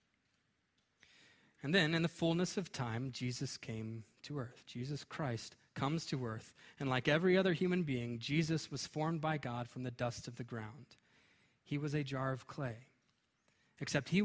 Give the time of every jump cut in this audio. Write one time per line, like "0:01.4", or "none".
none

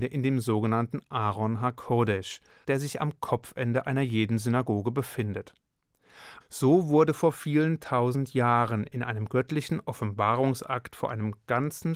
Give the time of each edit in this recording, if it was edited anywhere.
0:02.6
0:06.4

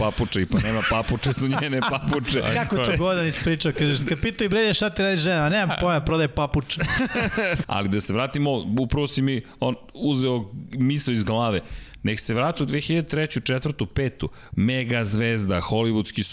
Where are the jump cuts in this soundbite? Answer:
0:07.6
0:14.5

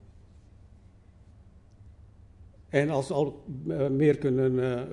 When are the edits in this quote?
none

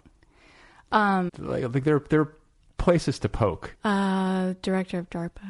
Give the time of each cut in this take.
0:01.3
0:03.7

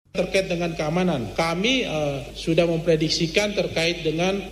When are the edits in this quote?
none

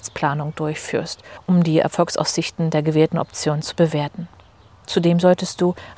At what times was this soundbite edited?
none

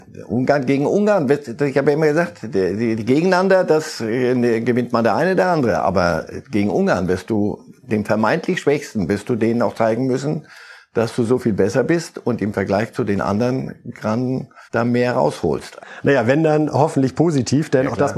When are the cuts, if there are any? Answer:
0:14.6
0:15.8

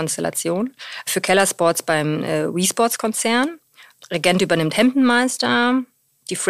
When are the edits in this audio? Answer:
none

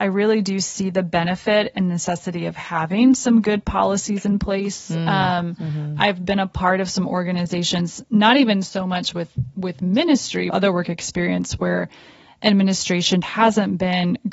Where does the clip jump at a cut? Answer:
0:10.5
0:13.2

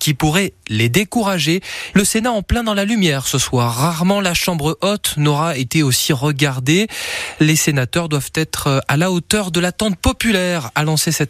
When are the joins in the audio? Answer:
0:01.9

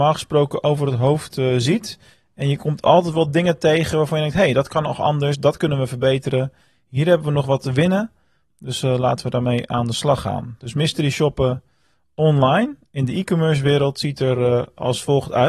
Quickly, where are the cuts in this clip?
none

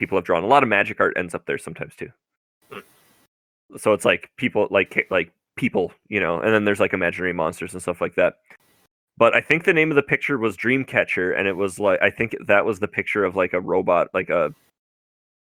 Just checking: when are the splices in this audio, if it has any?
none

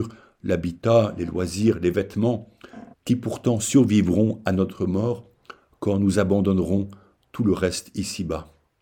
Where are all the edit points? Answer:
0:02.9

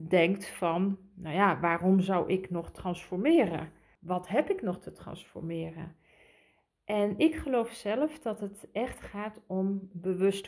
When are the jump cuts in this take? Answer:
none

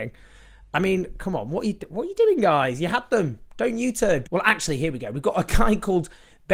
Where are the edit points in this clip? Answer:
0:04.2

